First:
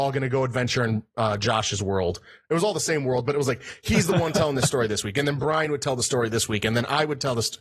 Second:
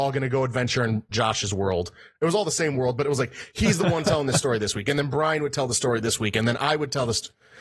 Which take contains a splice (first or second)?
second